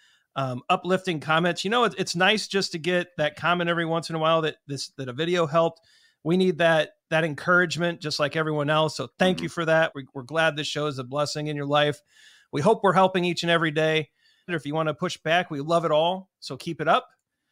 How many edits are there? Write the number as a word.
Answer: two